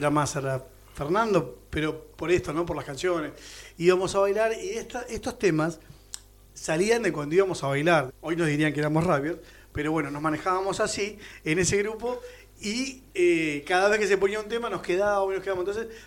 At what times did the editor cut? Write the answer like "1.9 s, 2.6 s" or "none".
8.1 s